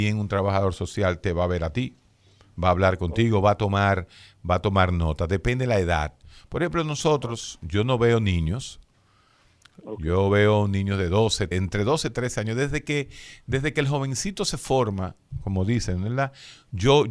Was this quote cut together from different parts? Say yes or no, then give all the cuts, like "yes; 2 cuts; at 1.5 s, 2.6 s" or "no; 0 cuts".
yes; 1 cut; at 11.5 s